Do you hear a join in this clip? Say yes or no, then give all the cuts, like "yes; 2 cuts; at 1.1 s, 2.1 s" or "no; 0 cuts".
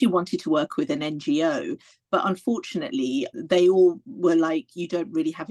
yes; 1 cut; at 3.3 s